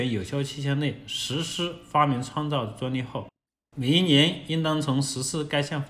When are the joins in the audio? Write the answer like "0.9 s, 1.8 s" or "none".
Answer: none